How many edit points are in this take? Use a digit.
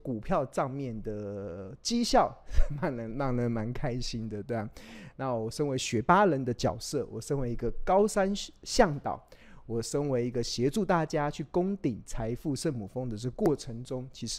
1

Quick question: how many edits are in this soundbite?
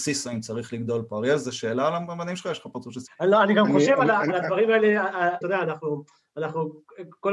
2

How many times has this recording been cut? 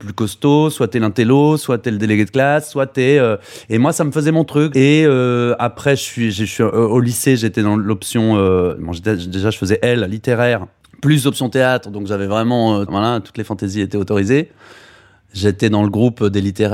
2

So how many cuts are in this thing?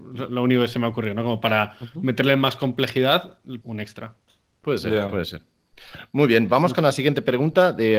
1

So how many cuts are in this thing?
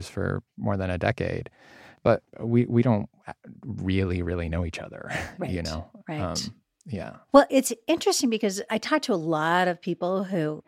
1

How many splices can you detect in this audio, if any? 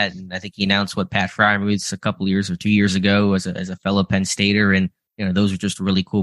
0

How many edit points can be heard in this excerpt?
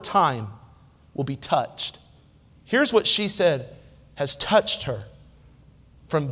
1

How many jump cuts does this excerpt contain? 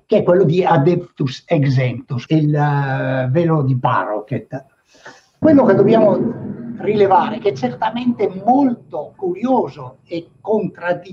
2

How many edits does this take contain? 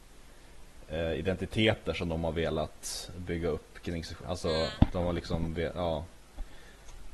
1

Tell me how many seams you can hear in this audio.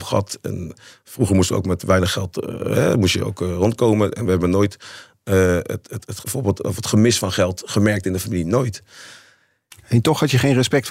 1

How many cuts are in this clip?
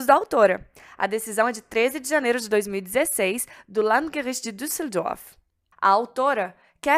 1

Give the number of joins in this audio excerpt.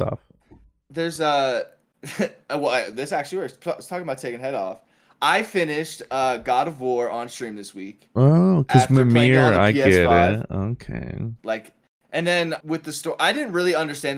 2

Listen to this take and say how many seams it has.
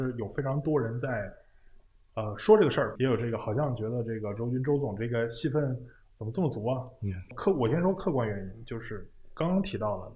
1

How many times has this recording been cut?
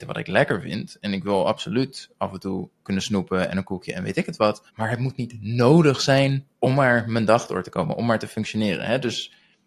2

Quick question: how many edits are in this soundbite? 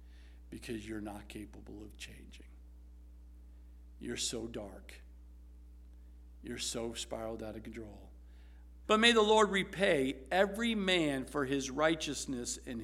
1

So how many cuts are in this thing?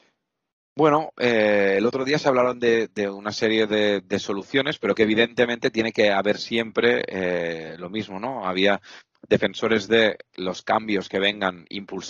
0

